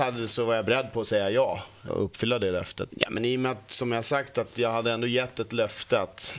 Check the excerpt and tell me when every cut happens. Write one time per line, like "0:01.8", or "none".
0:01.9
0:02.9